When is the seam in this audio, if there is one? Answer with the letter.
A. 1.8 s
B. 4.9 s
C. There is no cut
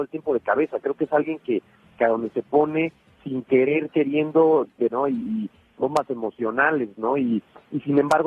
B